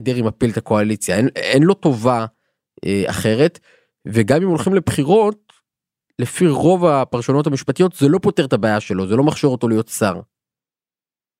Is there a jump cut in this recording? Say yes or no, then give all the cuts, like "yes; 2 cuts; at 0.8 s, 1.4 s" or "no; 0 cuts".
no; 0 cuts